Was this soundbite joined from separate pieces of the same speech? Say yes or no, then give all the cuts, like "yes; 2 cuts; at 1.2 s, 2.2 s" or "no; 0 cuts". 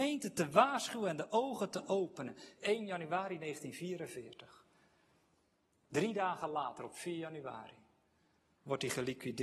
no; 0 cuts